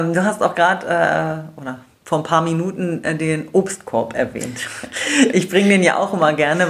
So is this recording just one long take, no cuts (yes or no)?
yes